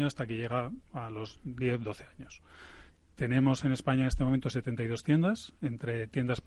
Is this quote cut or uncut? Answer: uncut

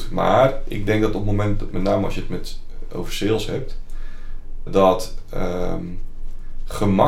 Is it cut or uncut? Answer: cut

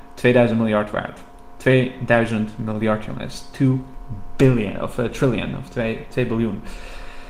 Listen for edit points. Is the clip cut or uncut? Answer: uncut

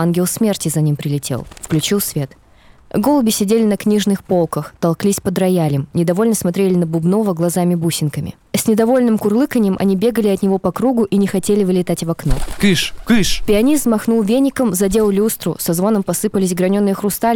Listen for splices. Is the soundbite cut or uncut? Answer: cut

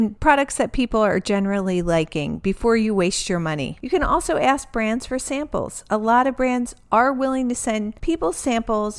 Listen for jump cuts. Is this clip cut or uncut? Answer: uncut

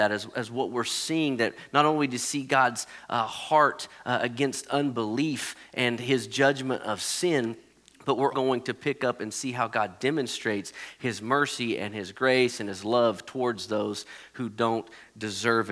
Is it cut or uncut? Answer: cut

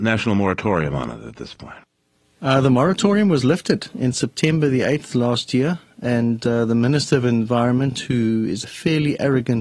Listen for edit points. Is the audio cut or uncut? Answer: uncut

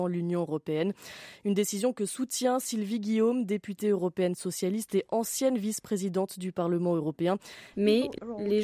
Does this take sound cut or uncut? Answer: cut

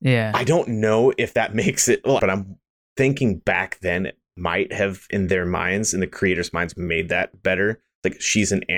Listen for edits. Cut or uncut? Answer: cut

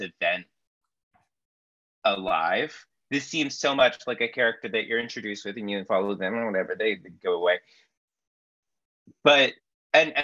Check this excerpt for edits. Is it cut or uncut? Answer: uncut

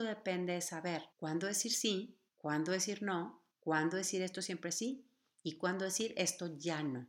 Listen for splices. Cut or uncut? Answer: cut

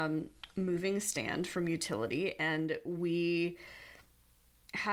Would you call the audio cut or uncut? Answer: uncut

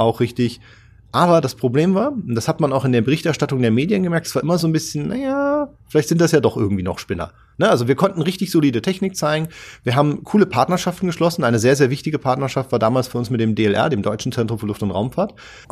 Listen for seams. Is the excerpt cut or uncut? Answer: uncut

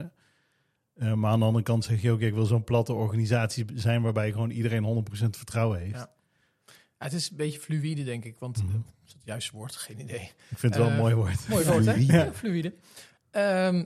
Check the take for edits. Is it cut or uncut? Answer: uncut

